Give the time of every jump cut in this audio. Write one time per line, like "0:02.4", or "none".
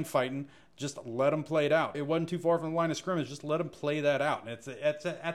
0:01.9